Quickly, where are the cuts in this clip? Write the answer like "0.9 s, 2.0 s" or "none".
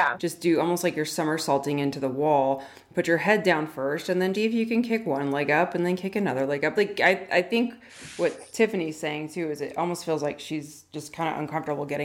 4.3 s, 6.8 s